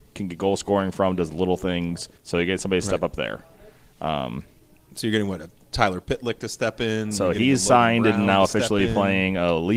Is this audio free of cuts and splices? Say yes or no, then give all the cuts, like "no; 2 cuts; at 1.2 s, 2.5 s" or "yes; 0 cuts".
no; 1 cut; at 2.2 s